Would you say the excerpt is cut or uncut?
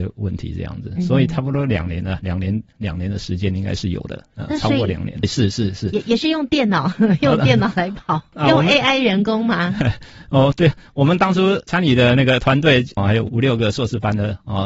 cut